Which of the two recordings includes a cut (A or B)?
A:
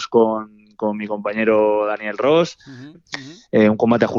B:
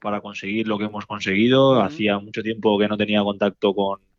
A